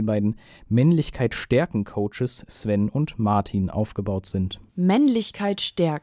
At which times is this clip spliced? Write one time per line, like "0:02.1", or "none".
0:04.7